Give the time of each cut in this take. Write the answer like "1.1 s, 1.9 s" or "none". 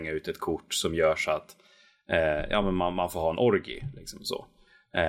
none